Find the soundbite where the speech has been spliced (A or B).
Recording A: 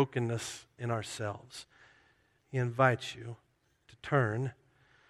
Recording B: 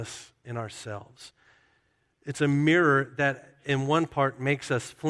A